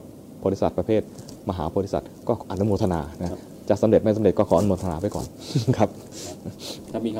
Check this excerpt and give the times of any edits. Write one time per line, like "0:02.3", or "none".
0:02.4